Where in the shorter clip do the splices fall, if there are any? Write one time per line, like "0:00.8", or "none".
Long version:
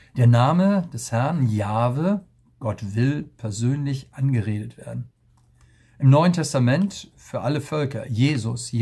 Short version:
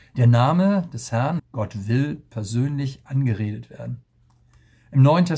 0:01.4